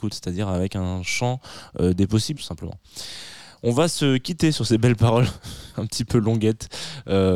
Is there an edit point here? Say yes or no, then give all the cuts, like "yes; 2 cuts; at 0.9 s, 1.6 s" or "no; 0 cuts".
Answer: yes; 1 cut; at 2.3 s